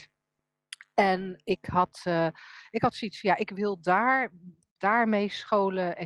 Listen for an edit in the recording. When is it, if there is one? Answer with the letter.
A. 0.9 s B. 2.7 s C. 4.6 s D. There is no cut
D